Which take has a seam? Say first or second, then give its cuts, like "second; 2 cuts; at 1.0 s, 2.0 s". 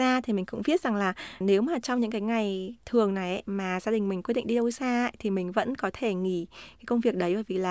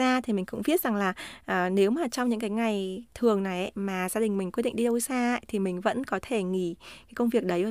first; 1 cut; at 1.4 s